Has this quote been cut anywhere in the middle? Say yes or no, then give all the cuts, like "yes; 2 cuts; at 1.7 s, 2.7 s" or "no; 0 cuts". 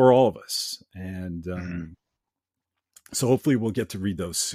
no; 0 cuts